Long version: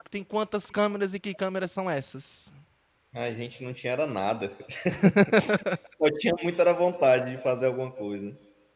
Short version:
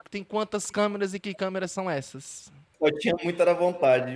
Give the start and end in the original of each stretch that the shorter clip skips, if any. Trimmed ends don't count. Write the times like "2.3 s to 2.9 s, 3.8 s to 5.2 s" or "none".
2.7 s to 5.9 s